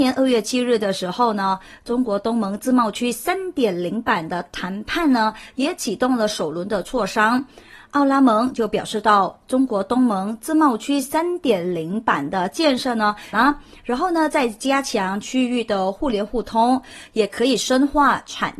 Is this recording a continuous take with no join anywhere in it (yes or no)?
no